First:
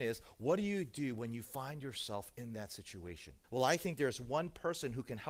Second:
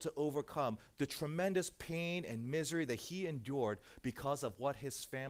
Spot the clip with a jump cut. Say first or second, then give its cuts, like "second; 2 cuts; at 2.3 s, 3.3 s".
first; 1 cut; at 3.4 s